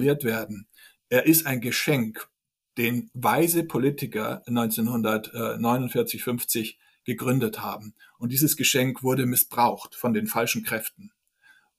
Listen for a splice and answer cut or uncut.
cut